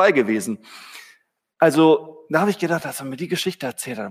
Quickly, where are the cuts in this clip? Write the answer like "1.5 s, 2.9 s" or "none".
none